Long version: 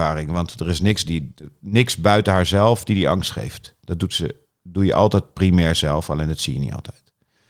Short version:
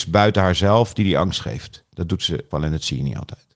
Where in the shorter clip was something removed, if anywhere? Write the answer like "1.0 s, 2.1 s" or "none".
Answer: 2.5 s